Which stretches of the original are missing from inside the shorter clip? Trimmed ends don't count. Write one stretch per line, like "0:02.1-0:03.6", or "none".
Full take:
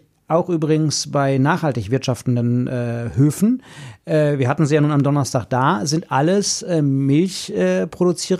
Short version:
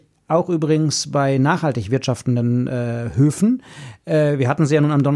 none